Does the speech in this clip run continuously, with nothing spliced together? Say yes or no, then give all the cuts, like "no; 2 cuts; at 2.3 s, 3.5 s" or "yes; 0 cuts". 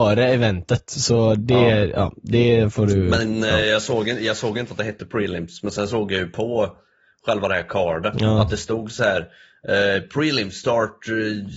yes; 0 cuts